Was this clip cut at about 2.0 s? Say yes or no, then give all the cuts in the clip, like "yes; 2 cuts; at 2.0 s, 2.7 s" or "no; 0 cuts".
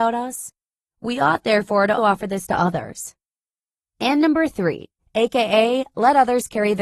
yes; 2 cuts; at 2.0 s, 5.0 s